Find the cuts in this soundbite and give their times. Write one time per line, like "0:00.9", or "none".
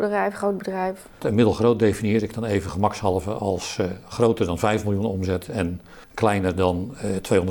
0:01.2
0:06.0